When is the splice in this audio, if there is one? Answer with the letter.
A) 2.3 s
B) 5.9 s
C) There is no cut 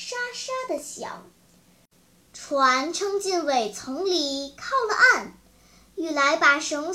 A